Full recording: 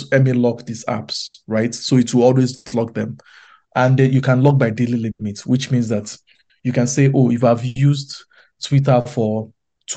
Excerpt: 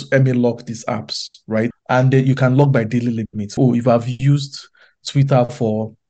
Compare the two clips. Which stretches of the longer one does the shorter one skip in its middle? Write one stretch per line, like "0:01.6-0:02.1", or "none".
0:01.7-0:03.6
0:05.4-0:07.1